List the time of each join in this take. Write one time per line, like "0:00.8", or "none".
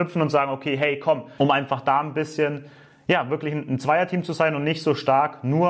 0:01.4